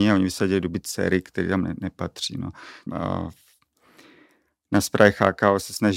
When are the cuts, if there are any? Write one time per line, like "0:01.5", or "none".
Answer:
0:02.9